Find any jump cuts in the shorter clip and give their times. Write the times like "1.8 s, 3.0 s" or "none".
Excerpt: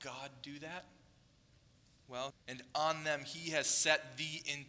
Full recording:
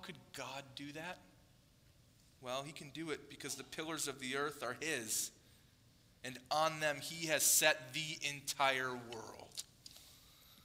2.3 s